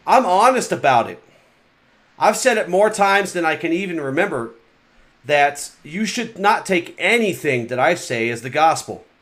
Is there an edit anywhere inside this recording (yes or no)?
no